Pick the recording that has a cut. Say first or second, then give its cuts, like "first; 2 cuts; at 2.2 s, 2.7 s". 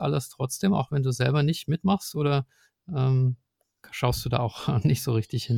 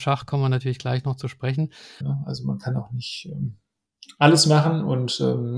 second; 1 cut; at 2.0 s